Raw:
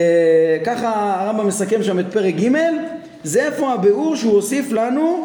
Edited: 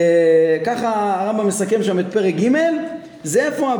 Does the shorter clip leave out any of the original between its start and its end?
no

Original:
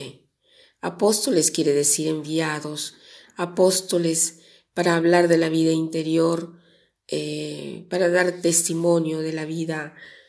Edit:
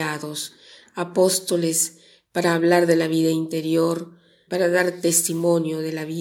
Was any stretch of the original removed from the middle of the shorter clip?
yes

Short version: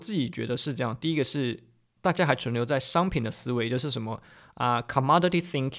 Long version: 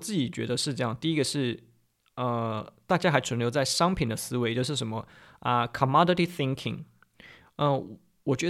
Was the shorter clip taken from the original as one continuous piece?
no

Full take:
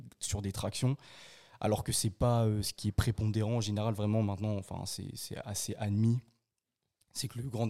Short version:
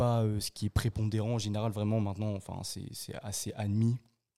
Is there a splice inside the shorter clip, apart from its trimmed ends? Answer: no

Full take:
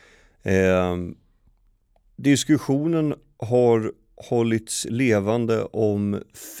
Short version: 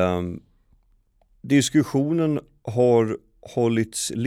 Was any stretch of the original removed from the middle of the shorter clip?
no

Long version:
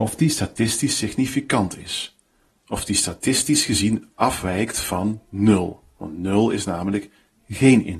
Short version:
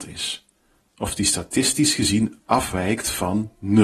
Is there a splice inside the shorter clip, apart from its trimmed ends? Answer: no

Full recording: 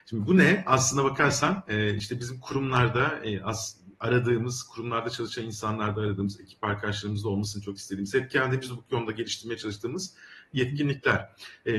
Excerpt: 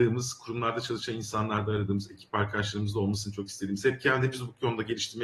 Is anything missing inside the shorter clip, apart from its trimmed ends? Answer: no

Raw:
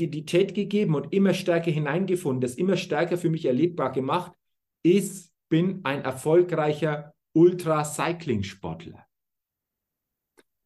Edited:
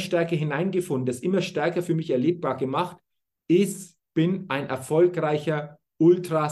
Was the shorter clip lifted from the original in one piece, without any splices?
yes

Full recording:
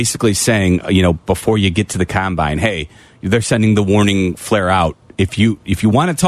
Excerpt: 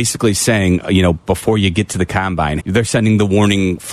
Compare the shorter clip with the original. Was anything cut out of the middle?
yes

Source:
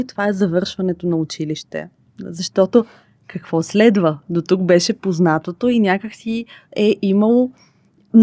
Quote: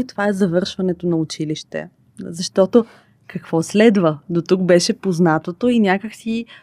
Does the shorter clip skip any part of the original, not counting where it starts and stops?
no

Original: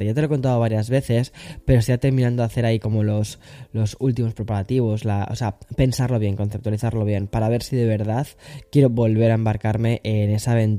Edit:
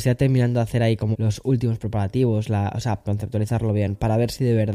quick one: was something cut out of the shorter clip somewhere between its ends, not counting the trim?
yes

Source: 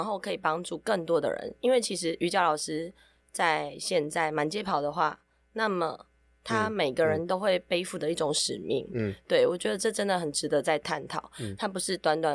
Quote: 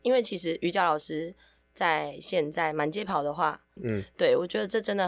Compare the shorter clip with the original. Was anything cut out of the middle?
yes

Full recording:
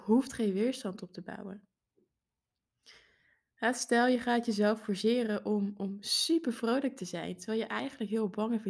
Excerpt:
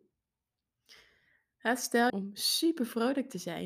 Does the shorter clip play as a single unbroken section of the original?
no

